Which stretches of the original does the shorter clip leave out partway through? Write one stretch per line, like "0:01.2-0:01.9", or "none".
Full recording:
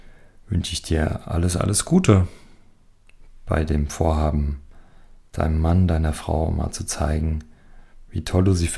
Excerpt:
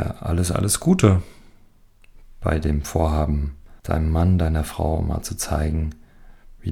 0:04.8-0:05.3